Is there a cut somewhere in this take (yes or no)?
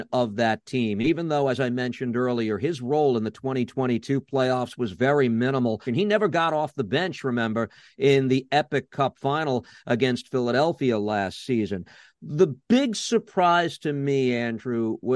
yes